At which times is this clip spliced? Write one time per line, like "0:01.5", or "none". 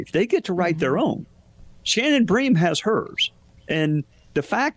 0:01.8